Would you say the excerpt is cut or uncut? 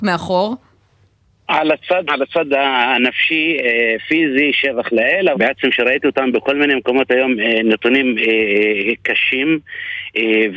cut